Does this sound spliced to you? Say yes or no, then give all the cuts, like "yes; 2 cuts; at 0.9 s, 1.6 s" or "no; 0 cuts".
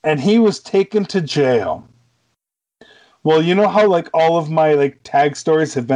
no; 0 cuts